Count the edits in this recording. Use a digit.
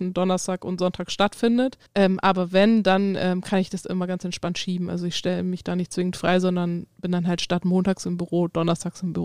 1